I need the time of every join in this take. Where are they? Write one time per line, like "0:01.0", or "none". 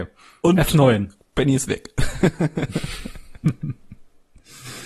none